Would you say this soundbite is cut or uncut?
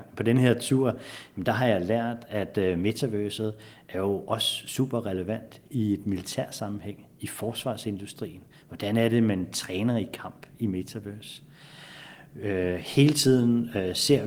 uncut